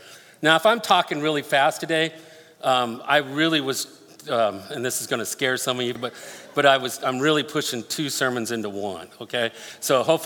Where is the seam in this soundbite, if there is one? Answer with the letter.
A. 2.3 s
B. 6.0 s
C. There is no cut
B